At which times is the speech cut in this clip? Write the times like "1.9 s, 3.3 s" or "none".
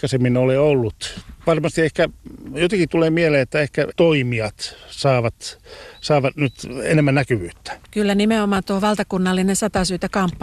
3.9 s, 7.8 s